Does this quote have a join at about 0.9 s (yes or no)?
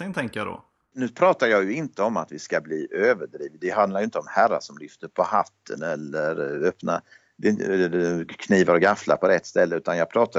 yes